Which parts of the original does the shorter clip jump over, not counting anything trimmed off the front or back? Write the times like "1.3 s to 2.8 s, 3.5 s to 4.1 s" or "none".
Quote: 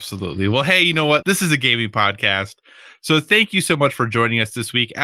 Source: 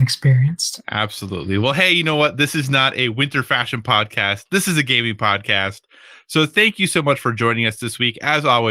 2.3 s to 4.5 s